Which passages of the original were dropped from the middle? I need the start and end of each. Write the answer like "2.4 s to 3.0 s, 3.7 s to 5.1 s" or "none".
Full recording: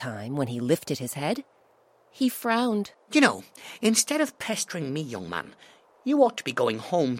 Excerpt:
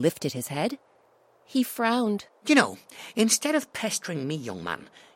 none